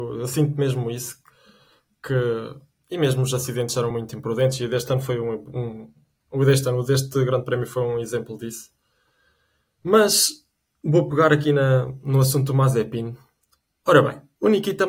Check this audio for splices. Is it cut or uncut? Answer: uncut